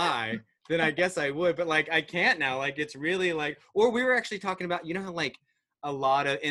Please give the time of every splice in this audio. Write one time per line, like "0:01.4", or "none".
none